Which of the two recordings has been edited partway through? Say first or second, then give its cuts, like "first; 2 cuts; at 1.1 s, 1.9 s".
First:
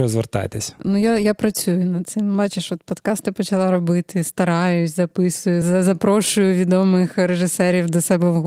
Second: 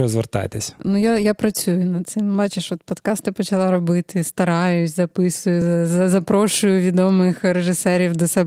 first; 1 cut; at 5.6 s